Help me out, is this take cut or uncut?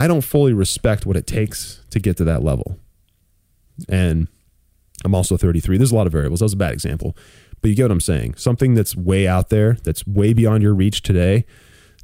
uncut